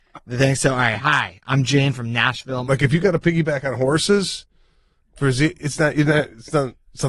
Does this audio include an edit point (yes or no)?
yes